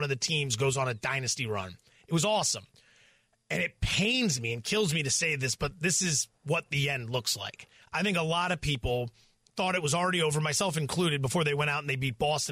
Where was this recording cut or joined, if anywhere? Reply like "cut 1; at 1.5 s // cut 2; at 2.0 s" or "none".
none